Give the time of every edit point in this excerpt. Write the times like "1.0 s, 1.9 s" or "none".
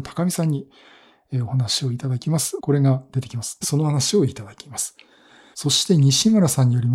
2.6 s, 3.6 s, 5.5 s

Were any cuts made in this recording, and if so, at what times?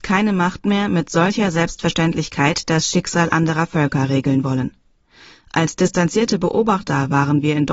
none

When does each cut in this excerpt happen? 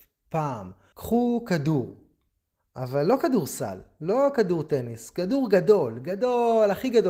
0.9 s

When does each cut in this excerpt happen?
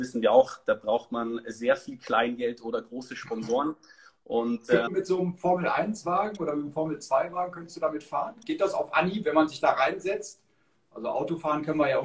4.9 s

